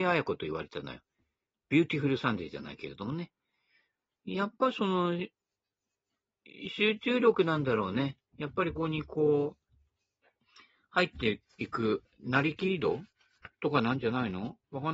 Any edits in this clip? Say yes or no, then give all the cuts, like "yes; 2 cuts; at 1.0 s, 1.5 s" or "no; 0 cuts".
yes; 2 cuts; at 8.7 s, 13.5 s